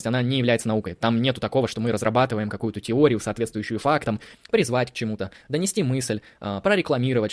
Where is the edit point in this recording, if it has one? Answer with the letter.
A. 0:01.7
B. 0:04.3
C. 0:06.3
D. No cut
B